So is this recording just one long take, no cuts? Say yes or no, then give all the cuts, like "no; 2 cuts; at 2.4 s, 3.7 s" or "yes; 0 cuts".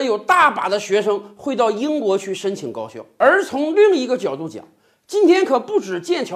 yes; 0 cuts